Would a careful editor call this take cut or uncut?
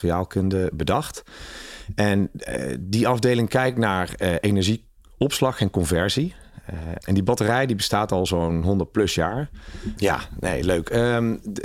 cut